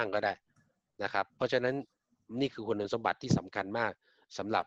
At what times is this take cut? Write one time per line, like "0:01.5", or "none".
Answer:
none